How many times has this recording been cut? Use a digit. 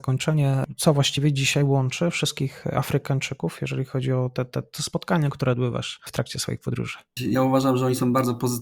1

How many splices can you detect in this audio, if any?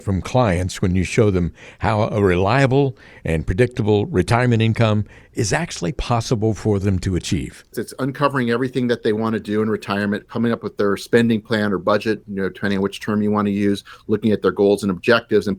1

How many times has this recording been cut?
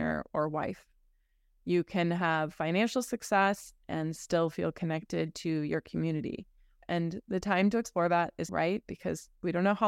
2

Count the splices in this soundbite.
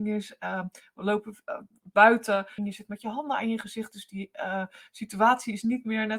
1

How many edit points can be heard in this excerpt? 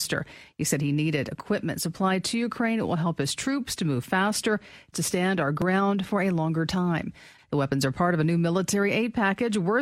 2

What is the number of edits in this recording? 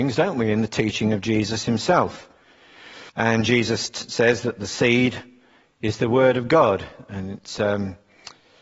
1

